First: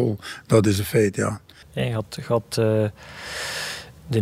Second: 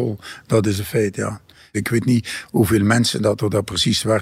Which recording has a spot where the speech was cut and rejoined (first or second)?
first